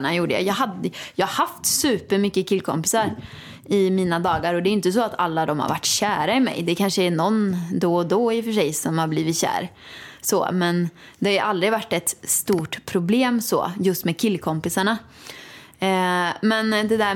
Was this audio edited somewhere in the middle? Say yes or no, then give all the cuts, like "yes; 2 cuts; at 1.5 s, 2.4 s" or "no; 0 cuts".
no; 0 cuts